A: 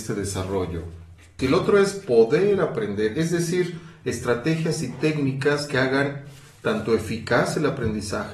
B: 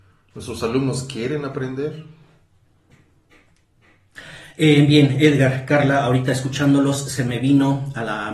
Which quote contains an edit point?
A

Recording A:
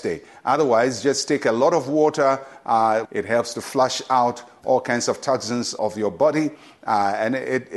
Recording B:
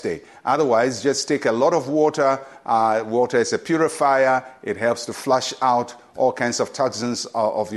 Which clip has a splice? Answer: A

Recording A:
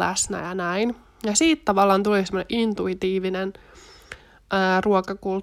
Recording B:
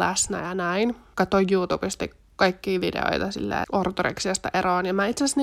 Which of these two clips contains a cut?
B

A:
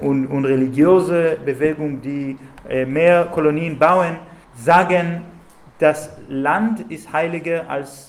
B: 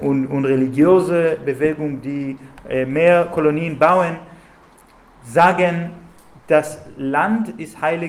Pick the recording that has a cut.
A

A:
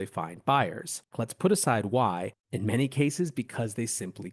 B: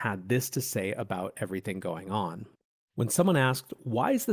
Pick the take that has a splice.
A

